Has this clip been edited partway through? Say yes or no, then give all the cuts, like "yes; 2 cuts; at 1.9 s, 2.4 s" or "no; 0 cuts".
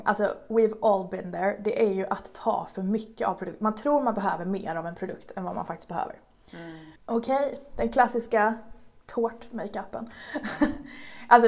yes; 1 cut; at 7.0 s